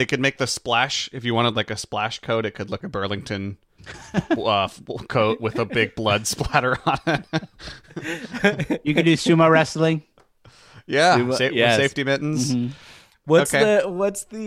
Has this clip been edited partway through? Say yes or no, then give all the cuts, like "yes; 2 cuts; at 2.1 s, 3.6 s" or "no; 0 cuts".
yes; 1 cut; at 2.8 s